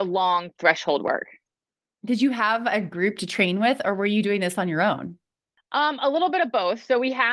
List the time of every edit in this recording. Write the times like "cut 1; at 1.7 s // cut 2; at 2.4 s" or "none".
none